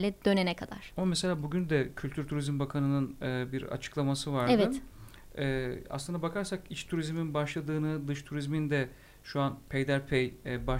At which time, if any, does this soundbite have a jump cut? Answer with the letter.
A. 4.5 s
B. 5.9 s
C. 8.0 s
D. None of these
D